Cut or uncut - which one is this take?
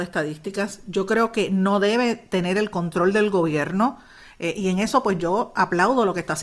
uncut